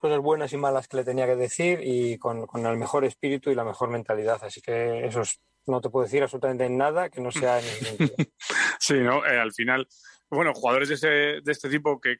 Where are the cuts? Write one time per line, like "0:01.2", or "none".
none